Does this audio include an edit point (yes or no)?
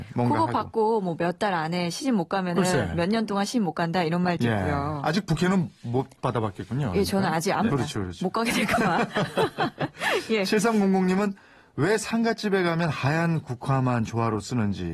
yes